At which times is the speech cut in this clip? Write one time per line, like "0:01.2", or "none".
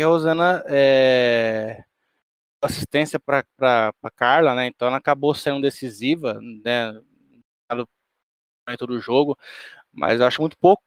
none